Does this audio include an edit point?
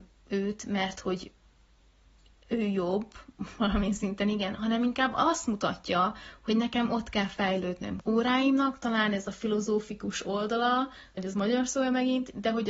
yes; 2 cuts; at 8.0 s, 11.2 s

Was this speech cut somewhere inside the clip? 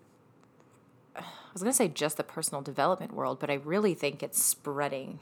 no; 0 cuts

